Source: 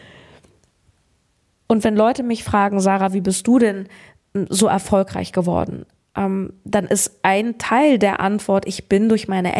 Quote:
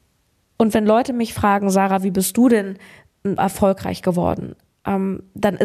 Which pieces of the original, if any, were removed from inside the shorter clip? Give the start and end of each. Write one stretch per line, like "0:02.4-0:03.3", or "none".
0:04.5-0:04.7